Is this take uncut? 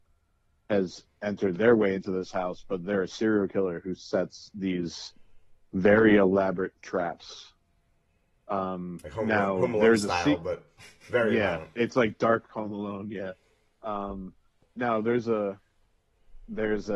yes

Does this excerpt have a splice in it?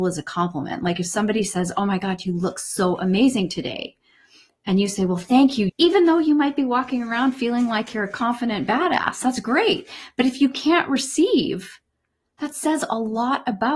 yes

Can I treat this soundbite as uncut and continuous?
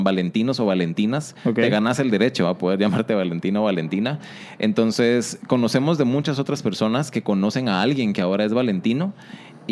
yes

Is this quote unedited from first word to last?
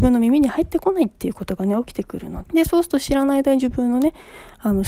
no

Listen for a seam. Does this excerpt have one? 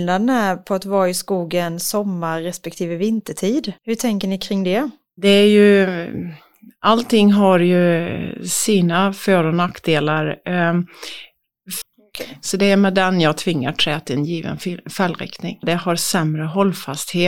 yes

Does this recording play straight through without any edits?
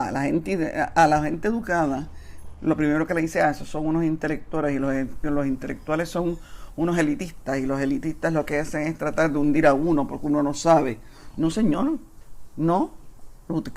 yes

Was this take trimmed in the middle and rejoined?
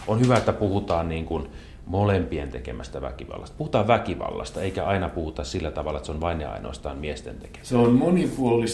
no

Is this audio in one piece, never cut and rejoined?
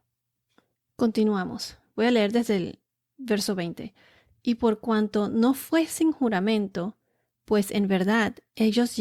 yes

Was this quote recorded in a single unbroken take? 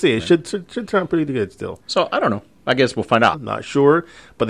no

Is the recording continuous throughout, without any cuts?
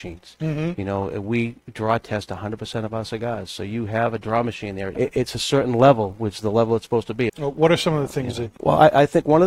no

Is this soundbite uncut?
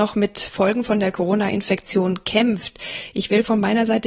yes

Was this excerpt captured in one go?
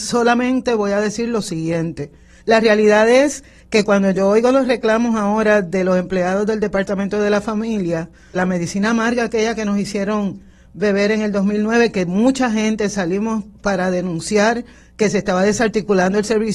no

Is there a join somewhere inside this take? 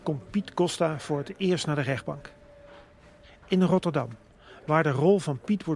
no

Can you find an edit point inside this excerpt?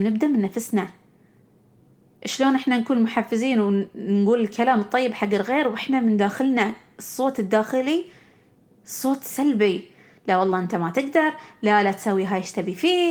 no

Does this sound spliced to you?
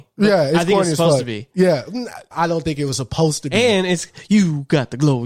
yes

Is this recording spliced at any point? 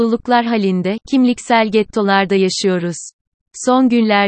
yes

